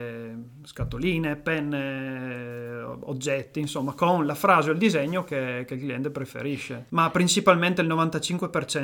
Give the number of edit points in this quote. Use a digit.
1